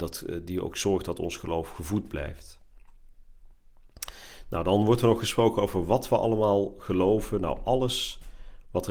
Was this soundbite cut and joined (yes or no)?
no